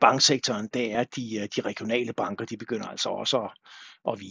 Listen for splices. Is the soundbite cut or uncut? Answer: uncut